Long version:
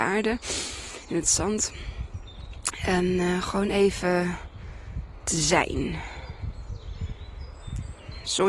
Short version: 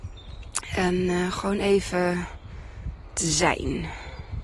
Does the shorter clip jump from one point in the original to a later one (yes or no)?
no